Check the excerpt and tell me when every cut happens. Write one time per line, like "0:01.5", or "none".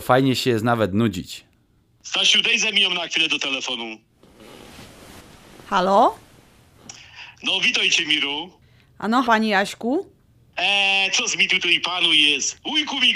0:09.2